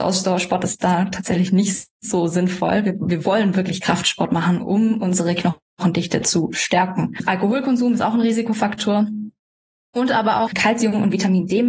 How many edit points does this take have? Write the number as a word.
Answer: one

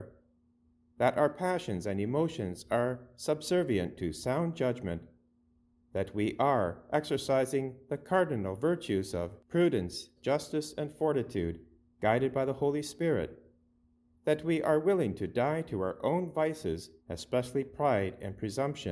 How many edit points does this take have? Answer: two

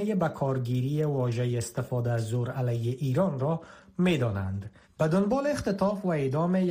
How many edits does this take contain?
one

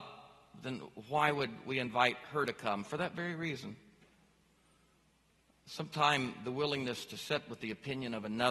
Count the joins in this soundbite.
zero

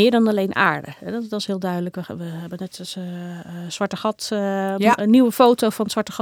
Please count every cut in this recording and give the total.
zero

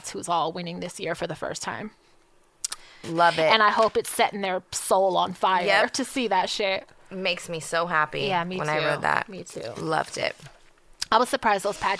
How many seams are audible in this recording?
one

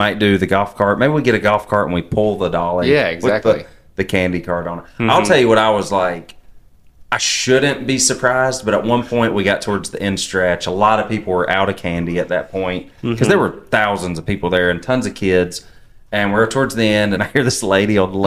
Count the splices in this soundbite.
one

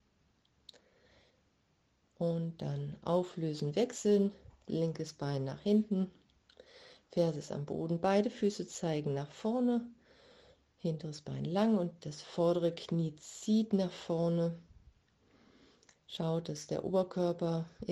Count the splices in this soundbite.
zero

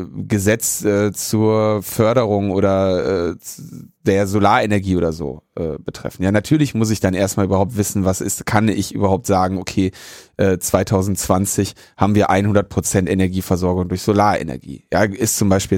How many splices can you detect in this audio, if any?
zero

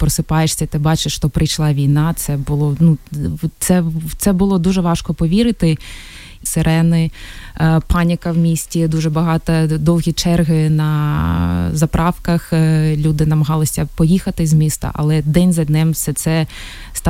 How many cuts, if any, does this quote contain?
one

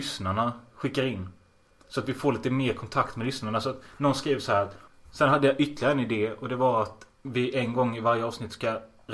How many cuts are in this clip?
two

